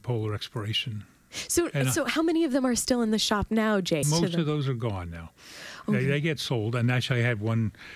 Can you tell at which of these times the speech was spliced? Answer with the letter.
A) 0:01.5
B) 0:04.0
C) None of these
B